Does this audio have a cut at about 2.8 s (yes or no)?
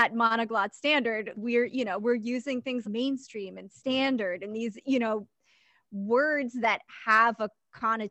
yes